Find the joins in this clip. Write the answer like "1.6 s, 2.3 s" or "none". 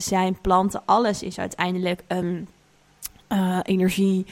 none